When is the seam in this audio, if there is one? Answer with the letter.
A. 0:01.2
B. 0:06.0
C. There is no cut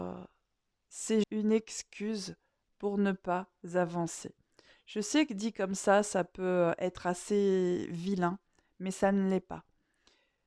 A